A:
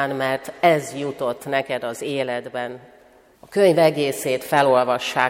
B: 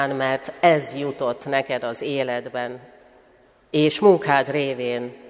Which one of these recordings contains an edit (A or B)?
A